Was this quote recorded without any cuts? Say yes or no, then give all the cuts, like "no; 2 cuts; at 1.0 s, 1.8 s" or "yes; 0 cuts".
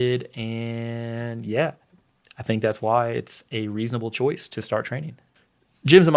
yes; 0 cuts